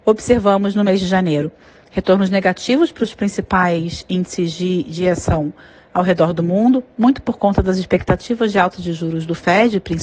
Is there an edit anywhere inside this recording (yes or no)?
no